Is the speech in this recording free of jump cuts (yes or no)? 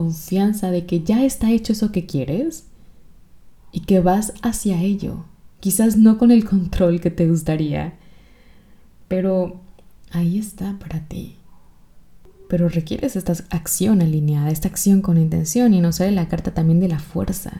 yes